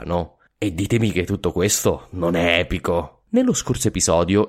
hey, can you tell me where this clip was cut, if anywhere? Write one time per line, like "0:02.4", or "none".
0:03.3

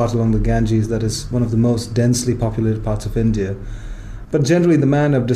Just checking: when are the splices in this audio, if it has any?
0:04.2

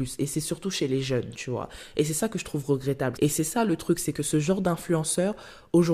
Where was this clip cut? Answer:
0:03.2

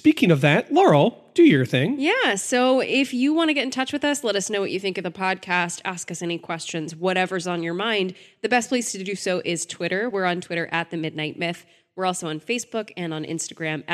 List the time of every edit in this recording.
none

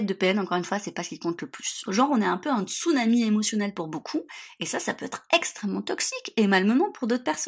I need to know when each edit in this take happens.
0:01.9

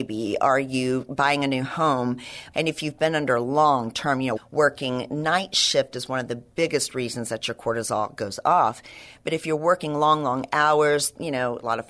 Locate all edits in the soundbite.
0:02.5
0:04.4

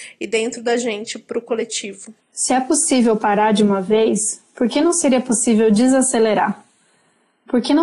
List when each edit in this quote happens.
0:02.2

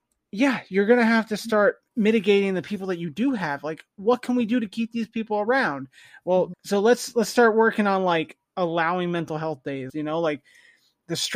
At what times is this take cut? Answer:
0:06.5
0:09.9

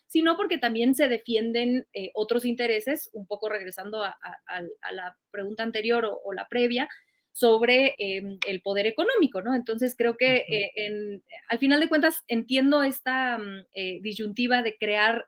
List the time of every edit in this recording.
0:07.9

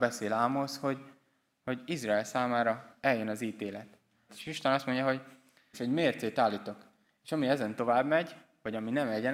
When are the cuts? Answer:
0:04.3
0:05.7

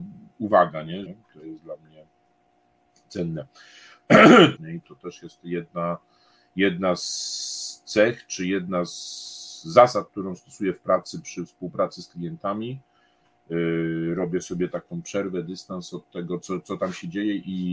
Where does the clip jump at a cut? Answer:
0:01.1
0:04.6

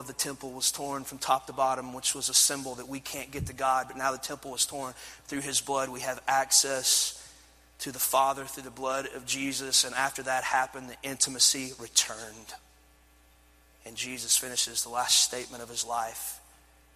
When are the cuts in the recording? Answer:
none

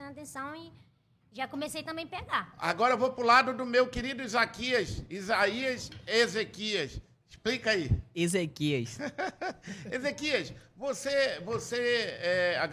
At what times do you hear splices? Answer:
none

